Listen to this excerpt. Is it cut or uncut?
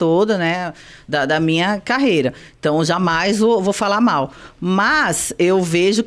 uncut